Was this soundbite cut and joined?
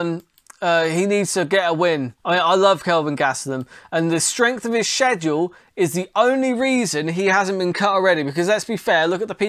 yes; 1 cut; at 2.2 s

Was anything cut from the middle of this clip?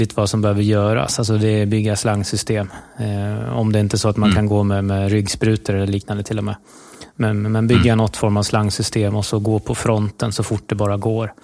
no; 0 cuts

